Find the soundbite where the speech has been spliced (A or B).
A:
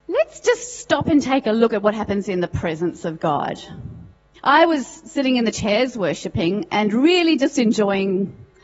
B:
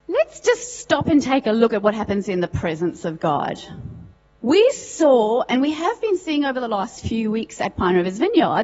A